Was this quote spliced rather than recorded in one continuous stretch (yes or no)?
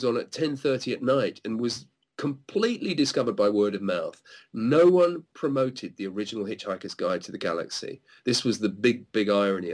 no